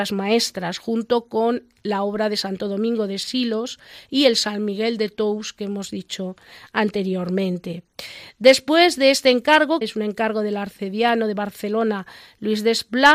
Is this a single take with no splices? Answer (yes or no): no